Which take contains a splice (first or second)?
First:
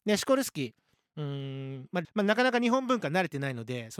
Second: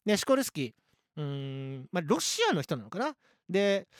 first